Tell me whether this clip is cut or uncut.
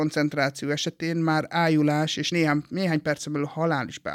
uncut